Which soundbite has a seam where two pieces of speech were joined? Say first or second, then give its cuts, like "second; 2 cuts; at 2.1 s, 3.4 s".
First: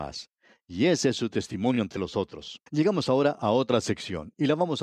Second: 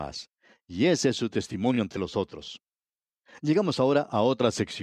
first; 1 cut; at 2.7 s